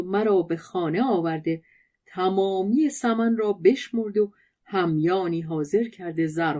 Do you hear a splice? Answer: no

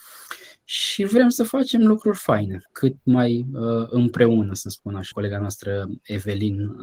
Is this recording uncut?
no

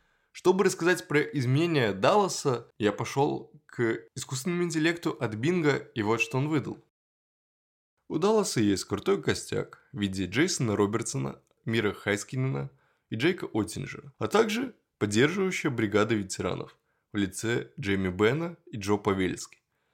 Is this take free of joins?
no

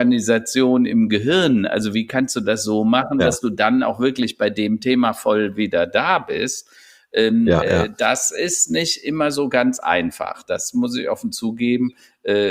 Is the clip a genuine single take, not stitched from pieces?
yes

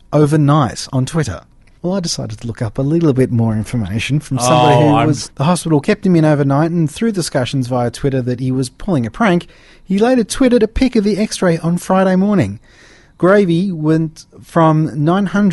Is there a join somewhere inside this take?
yes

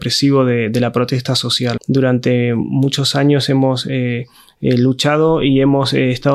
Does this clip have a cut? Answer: yes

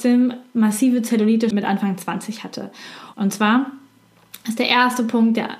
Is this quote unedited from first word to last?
no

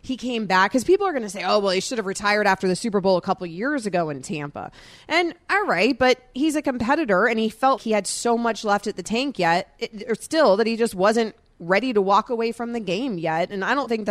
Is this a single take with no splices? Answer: no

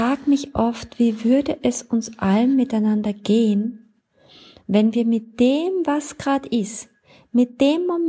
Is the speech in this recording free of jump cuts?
yes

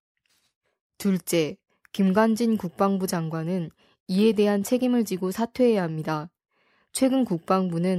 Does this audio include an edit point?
no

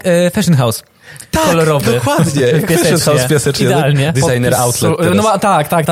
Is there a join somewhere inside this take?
no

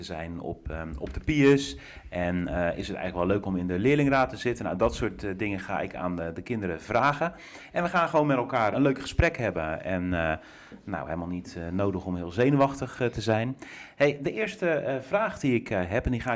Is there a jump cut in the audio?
yes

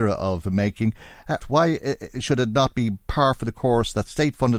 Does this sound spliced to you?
yes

